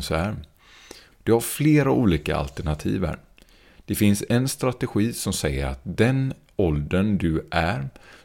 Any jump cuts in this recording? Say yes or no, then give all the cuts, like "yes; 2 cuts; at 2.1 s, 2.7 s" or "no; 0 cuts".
yes; 1 cut; at 1.1 s